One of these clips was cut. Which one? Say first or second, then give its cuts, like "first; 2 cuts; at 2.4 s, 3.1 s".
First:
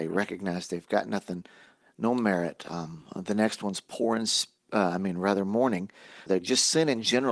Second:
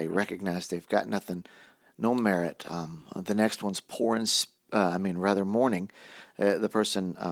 first; 1 cut; at 6.3 s